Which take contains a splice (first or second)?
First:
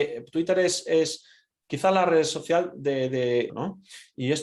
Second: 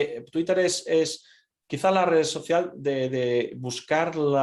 first